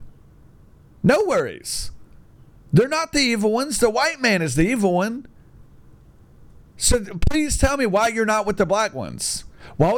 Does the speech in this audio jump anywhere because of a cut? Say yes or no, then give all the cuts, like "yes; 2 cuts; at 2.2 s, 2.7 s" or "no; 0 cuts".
no; 0 cuts